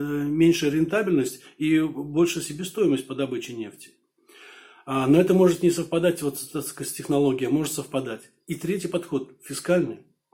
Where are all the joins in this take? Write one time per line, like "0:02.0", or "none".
none